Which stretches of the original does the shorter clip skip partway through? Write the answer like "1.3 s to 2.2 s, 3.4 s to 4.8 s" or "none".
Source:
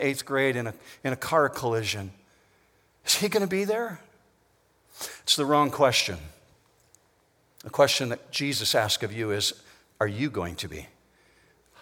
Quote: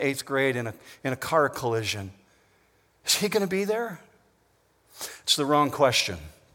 none